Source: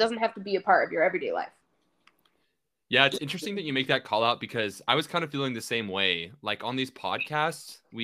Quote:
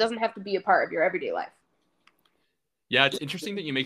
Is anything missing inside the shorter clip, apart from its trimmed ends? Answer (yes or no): no